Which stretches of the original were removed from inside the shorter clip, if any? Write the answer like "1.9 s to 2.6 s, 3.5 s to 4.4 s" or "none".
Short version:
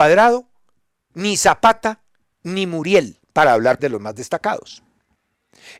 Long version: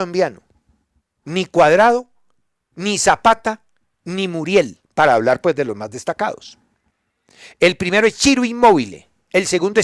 5.4 s to 5.5 s